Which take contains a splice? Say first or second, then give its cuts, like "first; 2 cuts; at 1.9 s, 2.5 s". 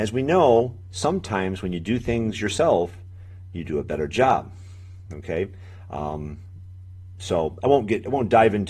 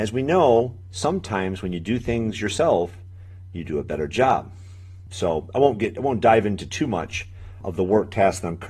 second; 2 cuts; at 5.1 s, 7.6 s